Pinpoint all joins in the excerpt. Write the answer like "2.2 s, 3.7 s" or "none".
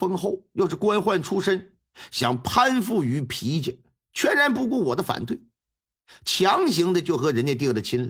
none